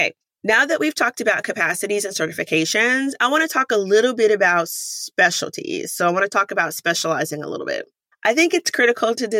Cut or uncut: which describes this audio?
cut